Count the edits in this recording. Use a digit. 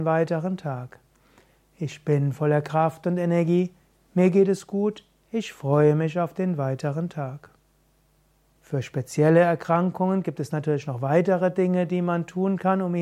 1